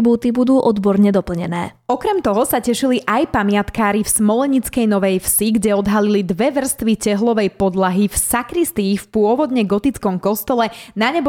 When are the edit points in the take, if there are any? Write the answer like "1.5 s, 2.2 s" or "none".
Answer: none

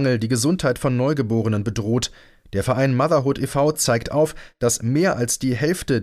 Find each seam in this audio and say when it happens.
none

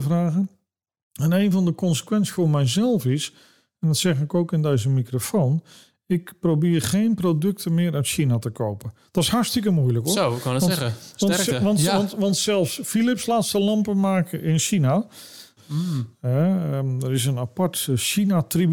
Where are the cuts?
15.6 s

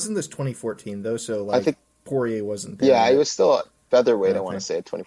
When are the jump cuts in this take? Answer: none

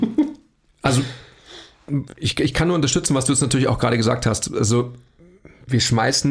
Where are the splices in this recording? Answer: none

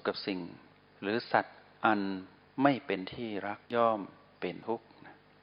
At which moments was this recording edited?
3.6 s

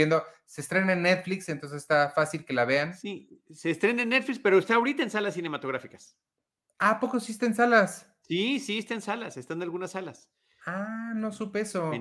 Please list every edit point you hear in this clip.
none

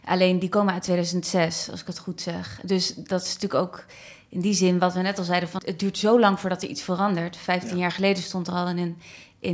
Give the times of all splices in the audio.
5.6 s

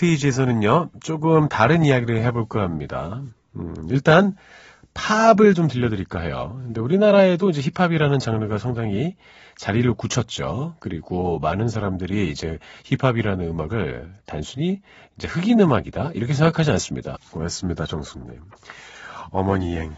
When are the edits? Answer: 17.2 s

